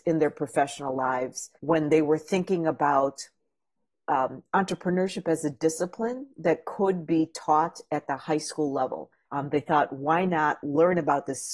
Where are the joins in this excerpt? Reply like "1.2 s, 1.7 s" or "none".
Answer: 1.6 s, 9.3 s